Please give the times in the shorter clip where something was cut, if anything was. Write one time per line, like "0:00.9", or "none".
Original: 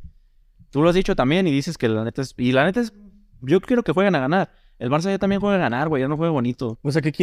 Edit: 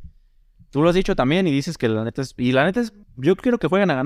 0:03.0